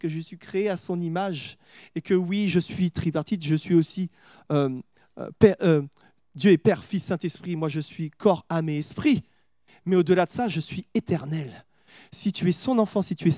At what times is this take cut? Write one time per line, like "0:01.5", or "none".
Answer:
none

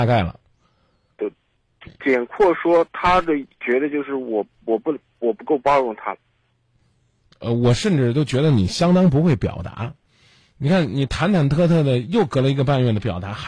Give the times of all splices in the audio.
none

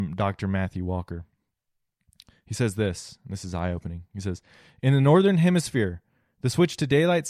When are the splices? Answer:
none

